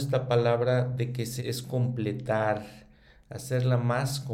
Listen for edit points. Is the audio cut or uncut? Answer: cut